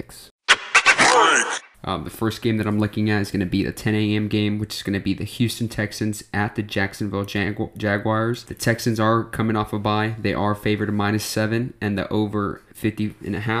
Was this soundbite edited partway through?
yes; 1 cut; at 1.7 s

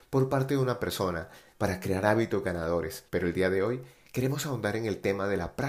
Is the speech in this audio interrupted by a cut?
yes; 2 cuts; at 1.5 s, 3.1 s

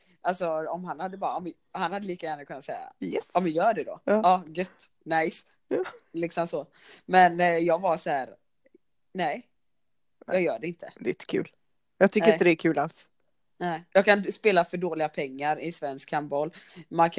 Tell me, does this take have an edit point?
no; 0 cuts

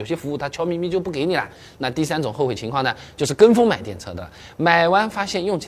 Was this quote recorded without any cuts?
yes; 0 cuts

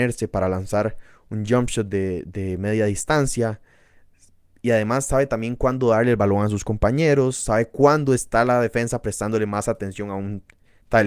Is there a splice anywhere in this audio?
no; 0 cuts

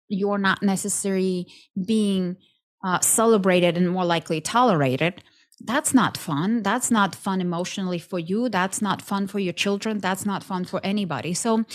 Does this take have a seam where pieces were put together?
no; 0 cuts

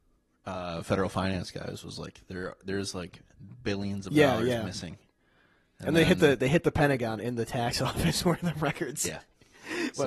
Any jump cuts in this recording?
no; 0 cuts

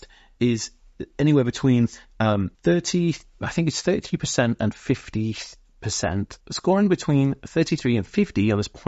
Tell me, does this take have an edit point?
yes; 1 cut; at 2.5 s

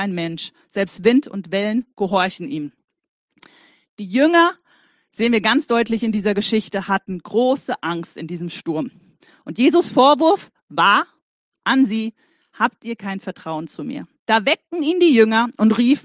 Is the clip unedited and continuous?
no; 1 cut; at 14.3 s

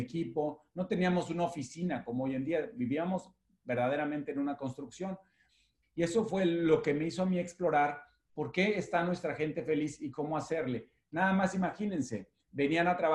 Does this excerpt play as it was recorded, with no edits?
no; 1 cut; at 5.8 s

